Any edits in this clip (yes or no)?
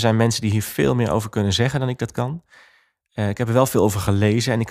no